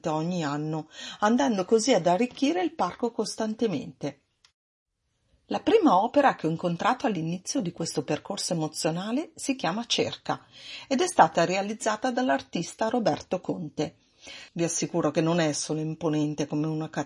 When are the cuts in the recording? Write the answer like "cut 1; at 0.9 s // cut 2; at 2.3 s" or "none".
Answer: cut 1; at 14.5 s